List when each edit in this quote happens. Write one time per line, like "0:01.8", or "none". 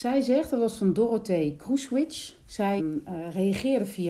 0:02.8

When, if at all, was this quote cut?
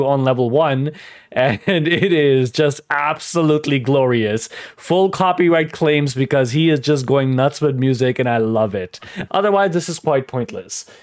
0:09.3

